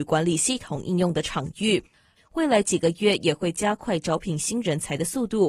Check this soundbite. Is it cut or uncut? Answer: cut